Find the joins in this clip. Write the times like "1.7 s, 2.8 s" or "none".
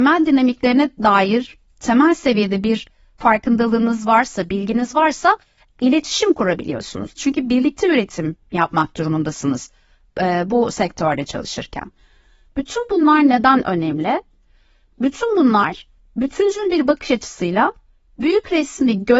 7.2 s, 12.5 s